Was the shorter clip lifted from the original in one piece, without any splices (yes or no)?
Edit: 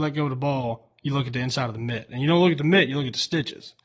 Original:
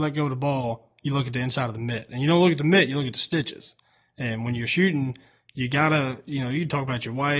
yes